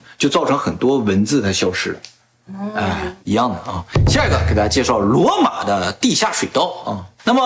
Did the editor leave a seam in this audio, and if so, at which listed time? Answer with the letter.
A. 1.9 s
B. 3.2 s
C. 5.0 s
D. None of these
B